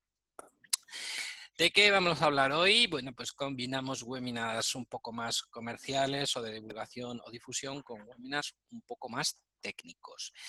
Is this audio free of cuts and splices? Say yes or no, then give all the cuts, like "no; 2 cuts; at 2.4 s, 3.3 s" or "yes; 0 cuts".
yes; 0 cuts